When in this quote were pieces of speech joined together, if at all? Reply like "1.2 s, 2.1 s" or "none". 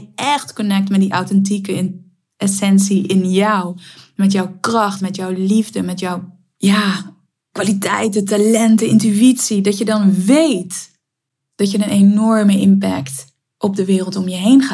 none